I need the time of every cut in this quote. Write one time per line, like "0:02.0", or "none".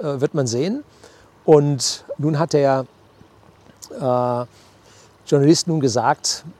0:02.2